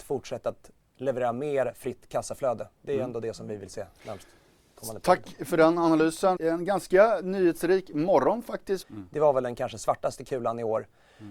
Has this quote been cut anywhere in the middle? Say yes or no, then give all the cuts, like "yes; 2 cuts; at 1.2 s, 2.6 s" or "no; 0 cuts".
yes; 2 cuts; at 6.4 s, 8.8 s